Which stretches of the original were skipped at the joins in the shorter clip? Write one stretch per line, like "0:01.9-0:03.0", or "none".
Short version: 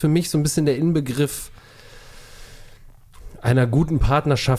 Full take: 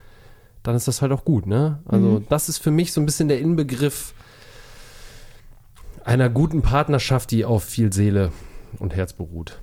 none